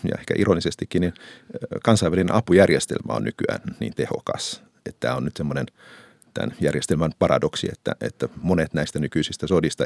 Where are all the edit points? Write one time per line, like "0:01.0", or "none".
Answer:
none